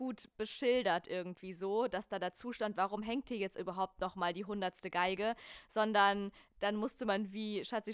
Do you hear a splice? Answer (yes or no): no